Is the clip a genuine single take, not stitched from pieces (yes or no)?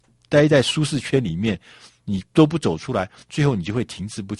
yes